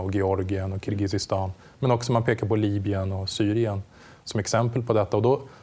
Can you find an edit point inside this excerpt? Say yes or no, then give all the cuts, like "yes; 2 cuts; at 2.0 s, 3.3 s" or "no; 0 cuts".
no; 0 cuts